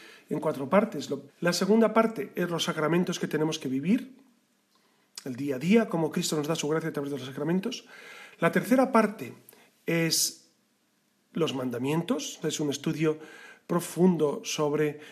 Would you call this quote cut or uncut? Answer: cut